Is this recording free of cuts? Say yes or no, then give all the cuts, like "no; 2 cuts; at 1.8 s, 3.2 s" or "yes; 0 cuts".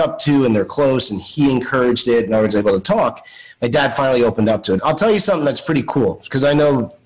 no; 1 cut; at 4.8 s